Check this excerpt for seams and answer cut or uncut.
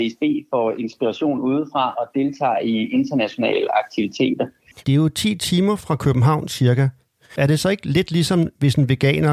cut